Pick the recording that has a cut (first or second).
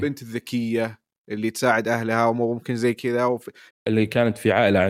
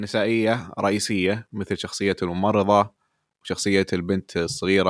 first